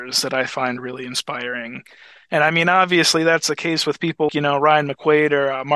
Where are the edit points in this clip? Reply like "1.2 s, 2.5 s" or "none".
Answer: 4.3 s